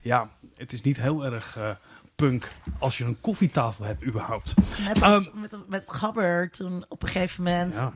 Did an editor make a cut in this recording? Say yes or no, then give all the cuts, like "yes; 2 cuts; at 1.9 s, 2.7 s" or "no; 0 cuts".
no; 0 cuts